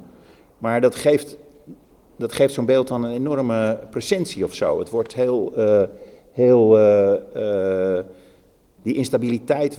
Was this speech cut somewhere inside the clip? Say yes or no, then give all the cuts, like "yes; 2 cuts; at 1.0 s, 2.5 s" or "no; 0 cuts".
no; 0 cuts